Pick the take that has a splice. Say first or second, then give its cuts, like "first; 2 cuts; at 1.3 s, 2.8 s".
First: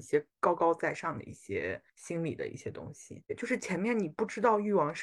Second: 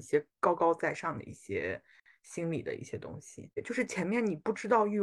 first; 1 cut; at 1.9 s